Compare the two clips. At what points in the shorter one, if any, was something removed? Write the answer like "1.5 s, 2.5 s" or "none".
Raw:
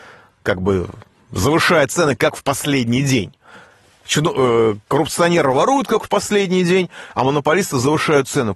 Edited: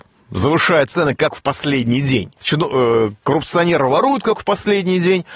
2.4 s